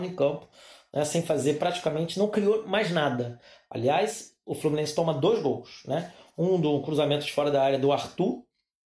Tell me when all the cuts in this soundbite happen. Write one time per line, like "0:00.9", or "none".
none